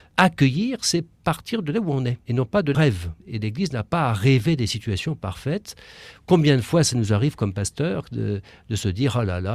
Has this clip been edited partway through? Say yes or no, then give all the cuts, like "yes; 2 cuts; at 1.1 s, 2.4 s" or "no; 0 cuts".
yes; 1 cut; at 3.2 s